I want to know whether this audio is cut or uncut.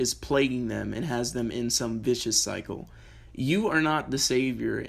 uncut